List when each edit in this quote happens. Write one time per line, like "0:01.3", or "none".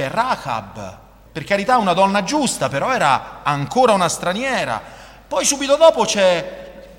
0:01.3